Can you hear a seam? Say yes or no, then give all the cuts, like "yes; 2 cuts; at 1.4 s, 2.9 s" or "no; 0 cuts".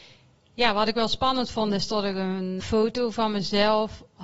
yes; 1 cut; at 2.6 s